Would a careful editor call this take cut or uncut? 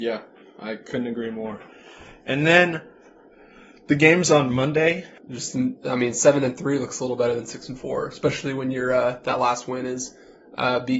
cut